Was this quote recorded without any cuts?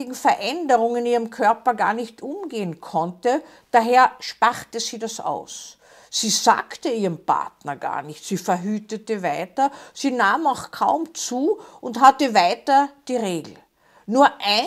yes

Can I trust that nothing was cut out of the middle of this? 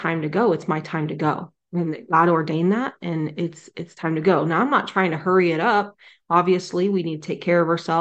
yes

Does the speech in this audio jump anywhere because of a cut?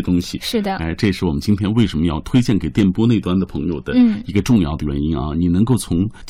no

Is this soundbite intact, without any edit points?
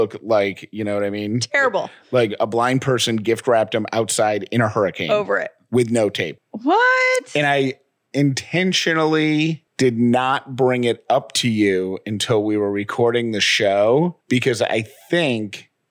no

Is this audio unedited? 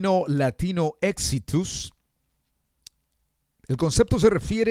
no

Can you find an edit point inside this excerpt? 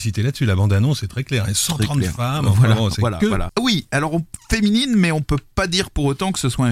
yes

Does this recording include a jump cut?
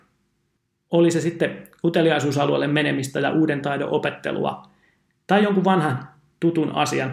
no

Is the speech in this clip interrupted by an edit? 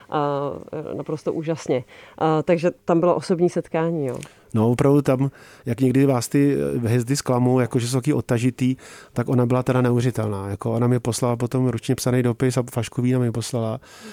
no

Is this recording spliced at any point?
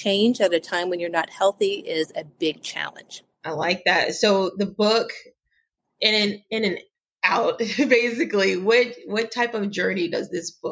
yes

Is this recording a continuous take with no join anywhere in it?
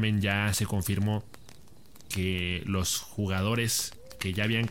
yes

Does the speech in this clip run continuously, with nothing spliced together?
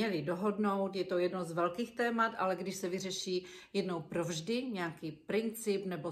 yes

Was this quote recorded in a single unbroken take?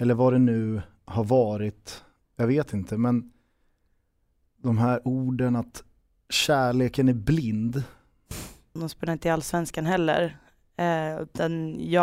no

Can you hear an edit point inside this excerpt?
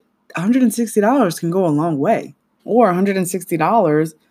yes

